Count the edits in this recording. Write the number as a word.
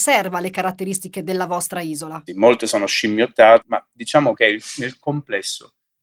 two